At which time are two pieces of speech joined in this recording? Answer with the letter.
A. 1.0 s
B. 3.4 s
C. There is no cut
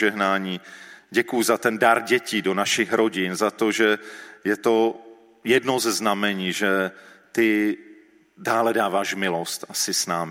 A